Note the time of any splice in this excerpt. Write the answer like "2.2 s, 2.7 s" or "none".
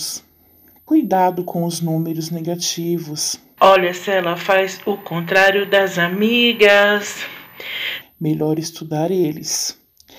3.6 s, 8.0 s